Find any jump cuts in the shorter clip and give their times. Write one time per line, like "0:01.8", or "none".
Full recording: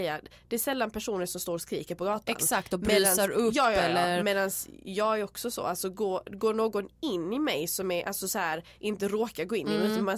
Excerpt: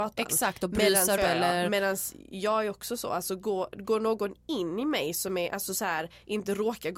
0:01.2

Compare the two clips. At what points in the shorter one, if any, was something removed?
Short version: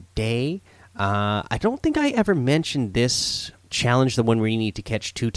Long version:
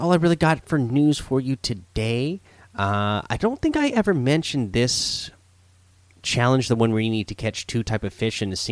0:03.6

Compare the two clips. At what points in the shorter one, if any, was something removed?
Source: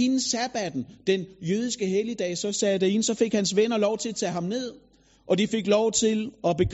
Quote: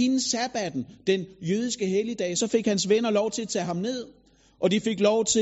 0:02.4

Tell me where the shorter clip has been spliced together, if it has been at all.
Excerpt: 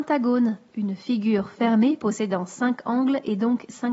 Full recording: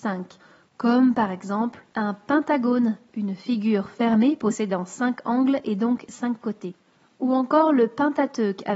none

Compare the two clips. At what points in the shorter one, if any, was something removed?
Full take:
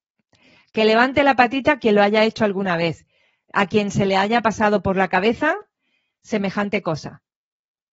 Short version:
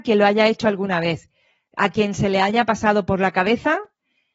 none

